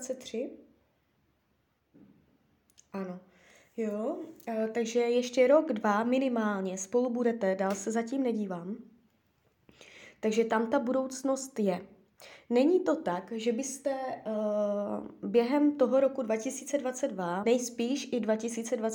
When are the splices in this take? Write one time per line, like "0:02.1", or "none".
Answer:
0:17.4